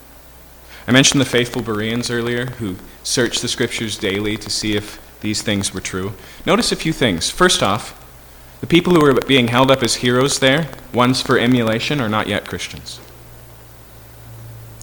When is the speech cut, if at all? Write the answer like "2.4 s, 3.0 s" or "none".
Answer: none